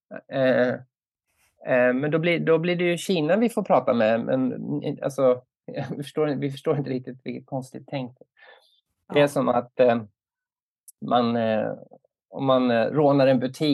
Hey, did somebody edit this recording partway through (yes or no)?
no